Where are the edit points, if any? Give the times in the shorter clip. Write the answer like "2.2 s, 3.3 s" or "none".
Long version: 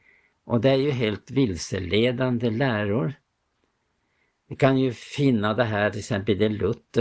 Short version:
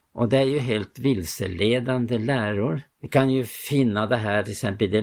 2.9 s